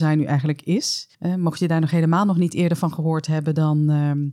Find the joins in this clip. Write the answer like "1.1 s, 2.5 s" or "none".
1.1 s